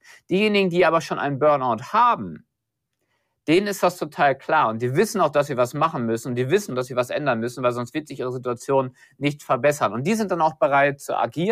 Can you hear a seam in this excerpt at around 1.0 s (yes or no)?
no